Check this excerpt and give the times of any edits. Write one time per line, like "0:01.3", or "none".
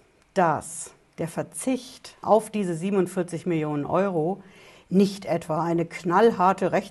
0:02.2